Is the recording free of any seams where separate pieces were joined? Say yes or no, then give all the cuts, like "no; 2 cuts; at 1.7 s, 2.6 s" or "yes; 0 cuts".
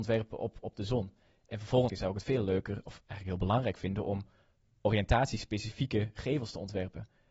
no; 1 cut; at 1.9 s